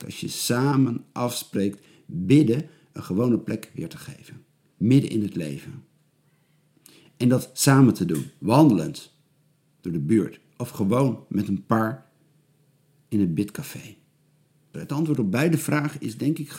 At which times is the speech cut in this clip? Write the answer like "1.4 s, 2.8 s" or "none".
9.7 s, 14.7 s

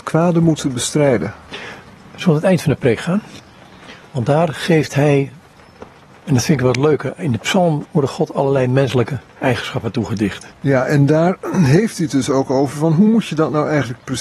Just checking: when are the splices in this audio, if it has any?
7.8 s, 10.5 s

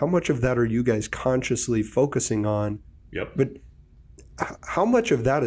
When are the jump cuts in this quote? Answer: 3.1 s

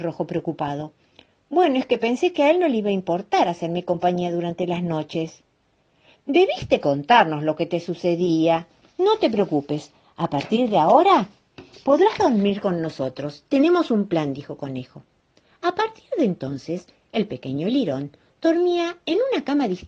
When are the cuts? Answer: none

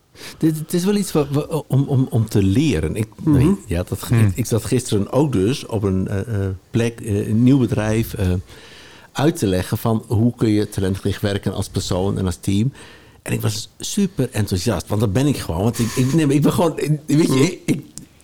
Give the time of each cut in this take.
none

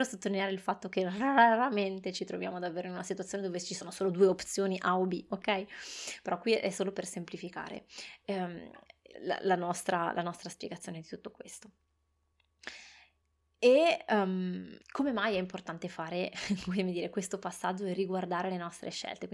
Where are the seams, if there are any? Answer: 9.1 s, 14.8 s

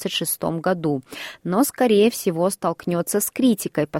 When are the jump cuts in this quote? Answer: none

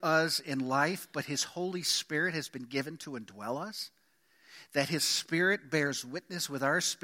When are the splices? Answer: none

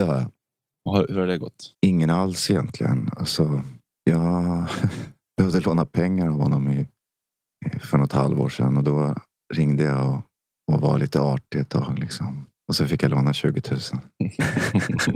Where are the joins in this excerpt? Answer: 1.7 s

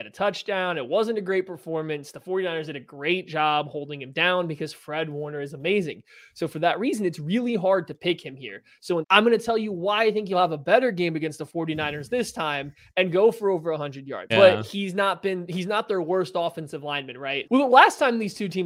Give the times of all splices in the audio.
9.0 s, 14.3 s, 17.4 s

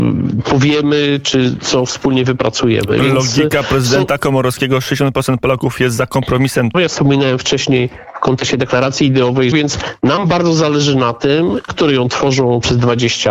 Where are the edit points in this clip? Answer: 6.7 s, 9.5 s, 11.7 s

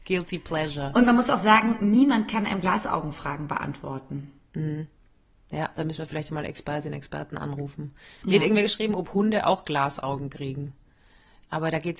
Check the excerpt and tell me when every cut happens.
none

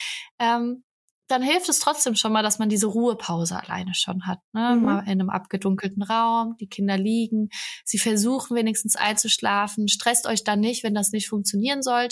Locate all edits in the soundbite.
none

